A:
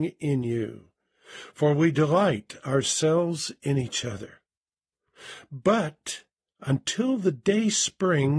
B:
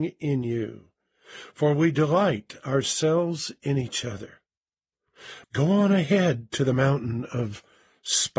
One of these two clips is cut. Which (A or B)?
B